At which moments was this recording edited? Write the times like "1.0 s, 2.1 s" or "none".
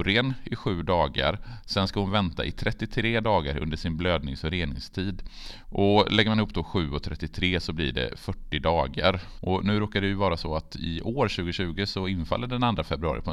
5.6 s, 9.4 s